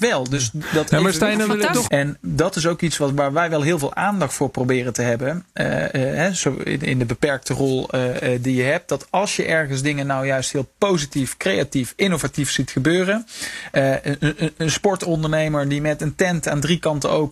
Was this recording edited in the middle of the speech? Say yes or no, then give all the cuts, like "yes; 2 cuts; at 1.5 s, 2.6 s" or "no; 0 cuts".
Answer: yes; 1 cut; at 1.9 s